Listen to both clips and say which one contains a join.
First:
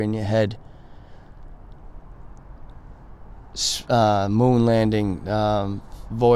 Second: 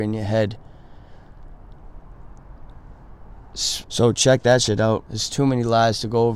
second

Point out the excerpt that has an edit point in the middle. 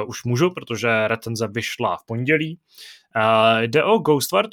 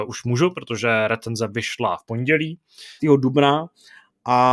second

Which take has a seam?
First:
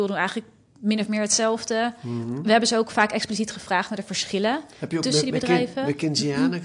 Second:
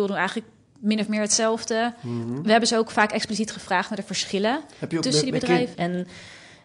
second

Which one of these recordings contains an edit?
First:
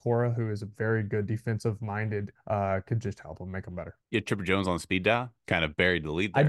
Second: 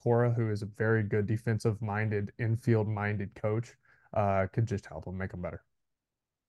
first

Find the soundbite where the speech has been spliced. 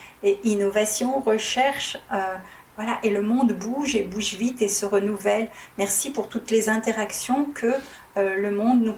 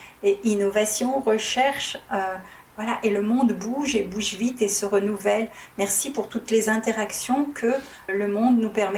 second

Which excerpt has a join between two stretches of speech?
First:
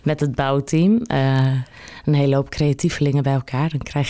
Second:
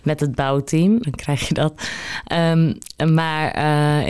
second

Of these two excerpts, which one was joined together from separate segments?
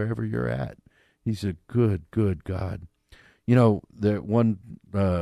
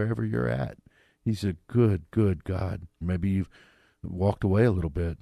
second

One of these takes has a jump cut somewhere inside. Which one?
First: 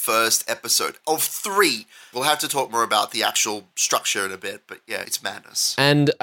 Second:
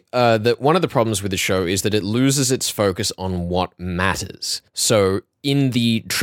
first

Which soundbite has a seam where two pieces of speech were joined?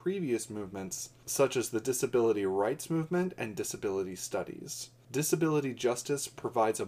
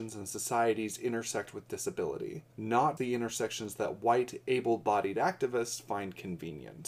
second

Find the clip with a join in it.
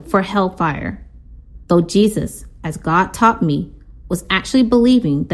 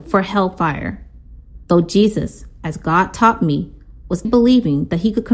second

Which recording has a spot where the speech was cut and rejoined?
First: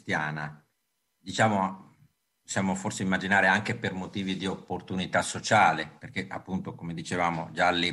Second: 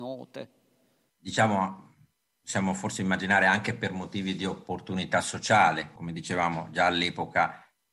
second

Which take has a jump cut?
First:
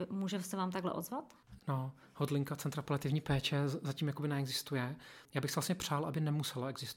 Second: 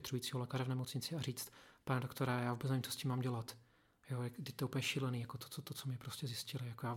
first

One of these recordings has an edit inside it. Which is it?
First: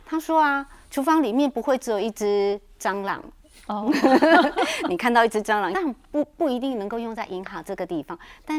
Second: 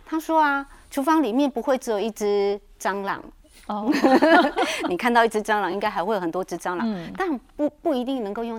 first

